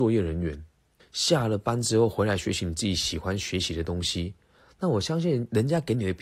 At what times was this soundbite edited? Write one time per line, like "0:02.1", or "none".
0:01.0